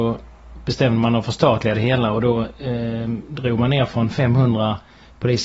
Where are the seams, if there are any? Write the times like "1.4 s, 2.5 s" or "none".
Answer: none